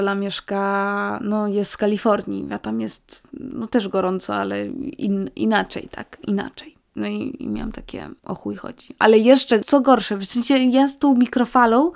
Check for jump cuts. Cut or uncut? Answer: cut